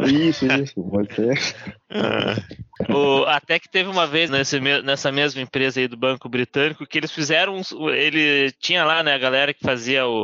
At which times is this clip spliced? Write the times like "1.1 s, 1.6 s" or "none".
4.3 s

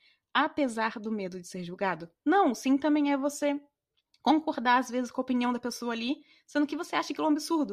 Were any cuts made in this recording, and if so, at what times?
2.2 s

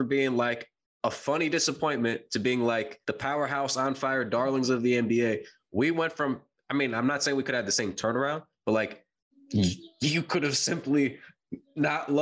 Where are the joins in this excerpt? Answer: 3.0 s

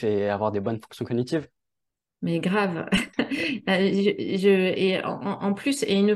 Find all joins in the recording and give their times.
3.1 s

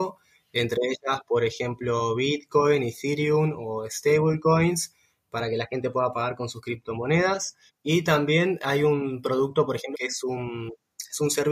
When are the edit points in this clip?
7.7 s, 9.9 s

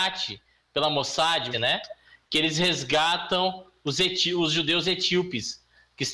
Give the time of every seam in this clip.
1.5 s

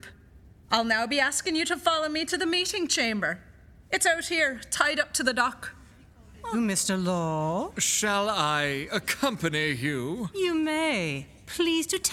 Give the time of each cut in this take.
6.5 s

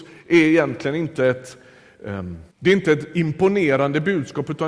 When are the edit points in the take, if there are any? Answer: 2.5 s

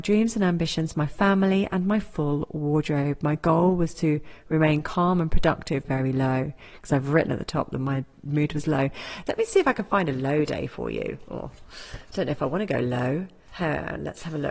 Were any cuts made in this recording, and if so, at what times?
5.8 s, 9.3 s

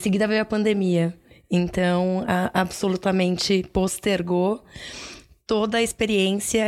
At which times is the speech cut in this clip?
none

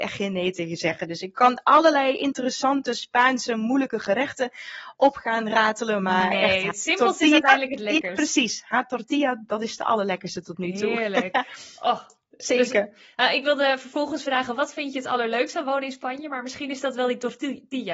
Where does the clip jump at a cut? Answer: none

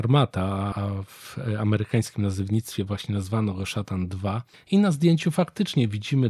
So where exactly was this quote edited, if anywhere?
4.6 s

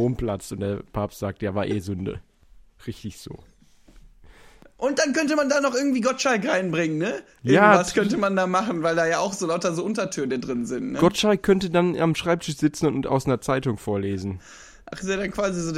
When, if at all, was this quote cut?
none

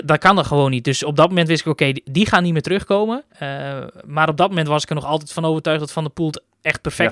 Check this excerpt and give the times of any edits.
3.3 s

